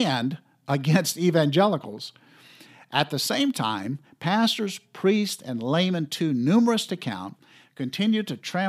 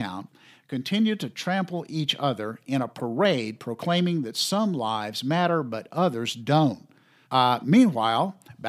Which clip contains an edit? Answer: second; 1 cut; at 7.2 s

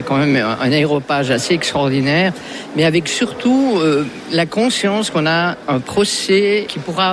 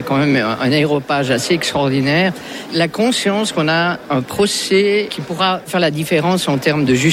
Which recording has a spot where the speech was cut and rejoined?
second; 1 cut; at 2.7 s

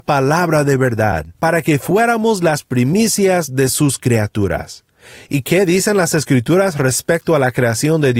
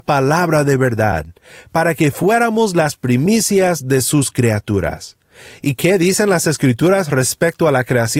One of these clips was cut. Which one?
first; 1 cut; at 1.3 s

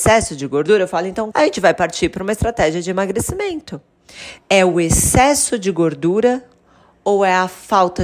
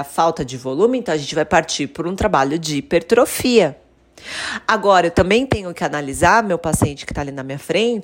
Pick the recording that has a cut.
first; 2 cuts; at 1.3 s, 4.4 s

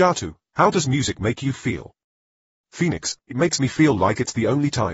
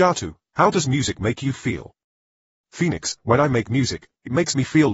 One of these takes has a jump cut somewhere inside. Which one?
first; 1 cut; at 3.2 s

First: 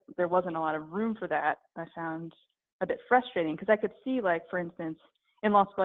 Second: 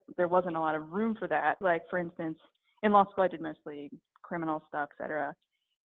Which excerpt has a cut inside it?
second; 2 cuts; at 1.6 s, 4.9 s

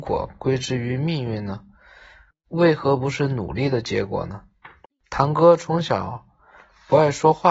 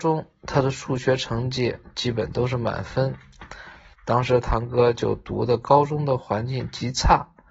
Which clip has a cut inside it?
second; 1 cut; at 3.9 s

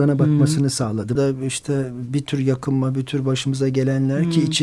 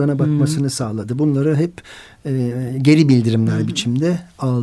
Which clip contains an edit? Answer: first; 1 cut; at 1.2 s

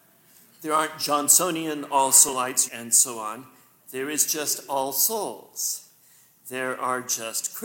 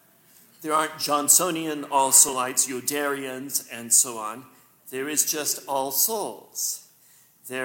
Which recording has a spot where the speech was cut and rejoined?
first; 1 cut; at 2.7 s

